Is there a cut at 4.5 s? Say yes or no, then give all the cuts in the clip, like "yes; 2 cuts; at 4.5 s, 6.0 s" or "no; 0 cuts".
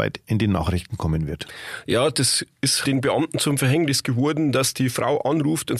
no; 1 cut; at 2.8 s